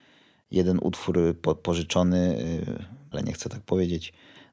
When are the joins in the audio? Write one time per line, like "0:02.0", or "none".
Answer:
0:03.1